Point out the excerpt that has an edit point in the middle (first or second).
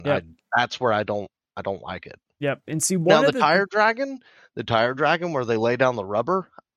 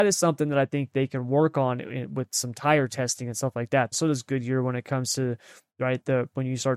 second